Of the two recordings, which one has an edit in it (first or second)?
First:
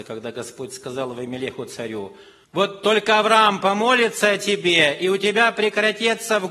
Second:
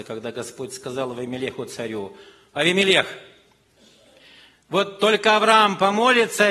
first